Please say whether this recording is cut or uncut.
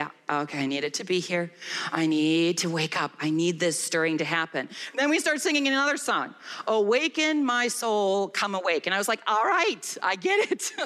uncut